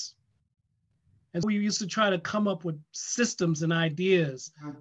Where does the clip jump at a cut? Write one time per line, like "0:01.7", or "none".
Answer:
0:01.4